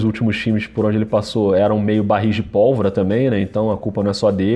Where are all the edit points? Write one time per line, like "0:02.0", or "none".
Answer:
none